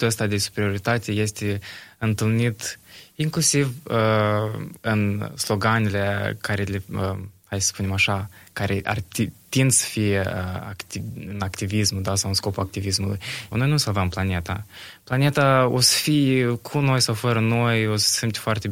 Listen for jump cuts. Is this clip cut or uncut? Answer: cut